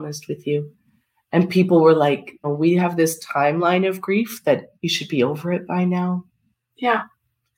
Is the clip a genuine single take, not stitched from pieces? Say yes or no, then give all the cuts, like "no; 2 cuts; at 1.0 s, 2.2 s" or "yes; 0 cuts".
no; 2 cuts; at 2.4 s, 4.8 s